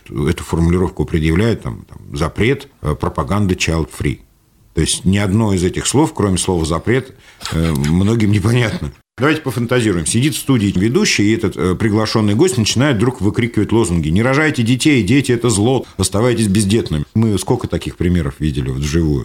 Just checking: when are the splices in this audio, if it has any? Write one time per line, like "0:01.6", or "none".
0:17.0

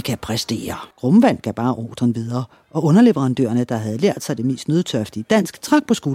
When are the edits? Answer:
0:00.9

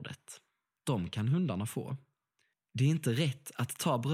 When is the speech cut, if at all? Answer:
0:02.5

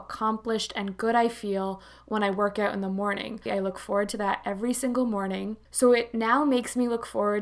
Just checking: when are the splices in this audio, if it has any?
0:03.5
0:05.7

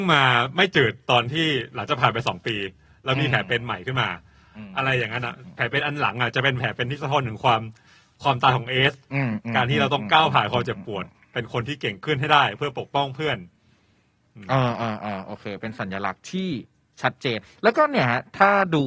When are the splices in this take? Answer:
none

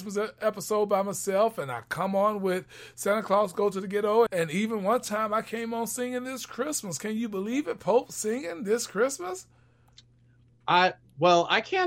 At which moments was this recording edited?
0:04.3

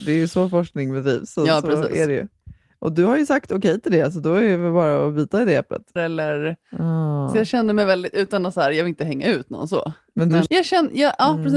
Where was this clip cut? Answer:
0:06.0
0:10.5

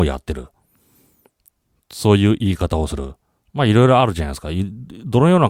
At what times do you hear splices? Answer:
none

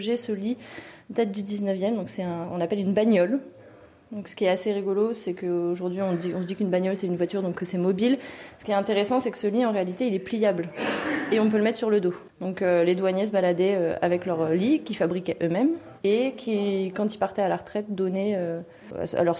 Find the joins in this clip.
0:16.0

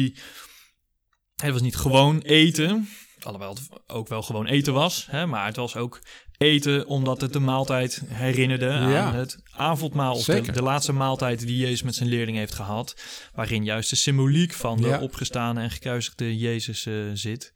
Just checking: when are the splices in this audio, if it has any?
none

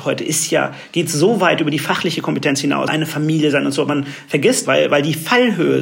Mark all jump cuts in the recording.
0:02.9
0:04.6

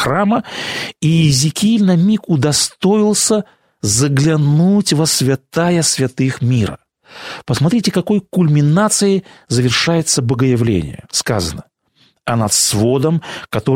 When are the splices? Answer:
none

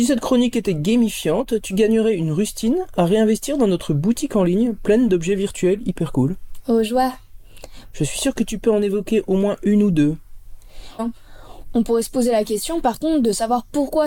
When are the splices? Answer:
0:07.9
0:11.0

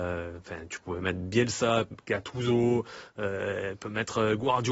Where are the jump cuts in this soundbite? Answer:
none

